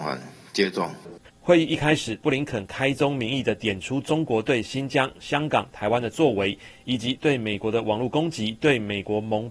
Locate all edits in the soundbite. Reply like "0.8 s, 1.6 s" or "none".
1.2 s